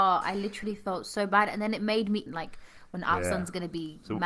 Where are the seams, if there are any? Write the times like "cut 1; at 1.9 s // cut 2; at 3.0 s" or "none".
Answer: cut 1; at 2.3 s